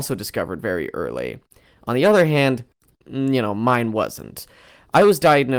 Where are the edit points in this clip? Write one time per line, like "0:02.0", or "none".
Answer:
none